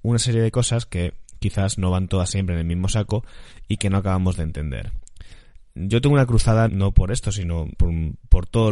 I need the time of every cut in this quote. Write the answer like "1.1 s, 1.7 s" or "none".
6.7 s, 7.7 s